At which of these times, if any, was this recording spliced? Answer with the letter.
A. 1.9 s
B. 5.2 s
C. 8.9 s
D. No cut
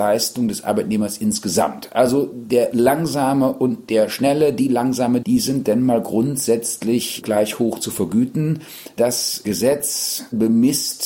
B